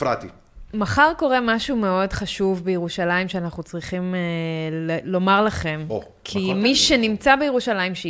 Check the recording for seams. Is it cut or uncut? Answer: uncut